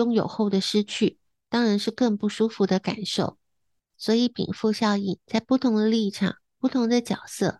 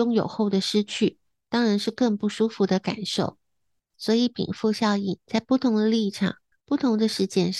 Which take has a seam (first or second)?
second